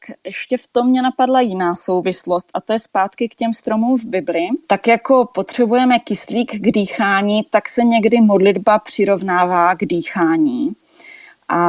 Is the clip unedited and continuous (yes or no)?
yes